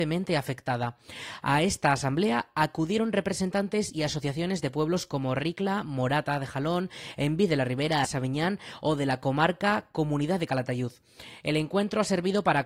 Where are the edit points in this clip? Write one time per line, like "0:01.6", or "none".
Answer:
0:08.0